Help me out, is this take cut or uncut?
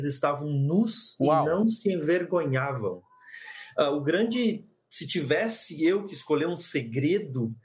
uncut